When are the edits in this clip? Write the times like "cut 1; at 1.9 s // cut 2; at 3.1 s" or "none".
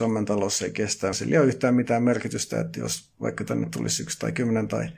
cut 1; at 1.1 s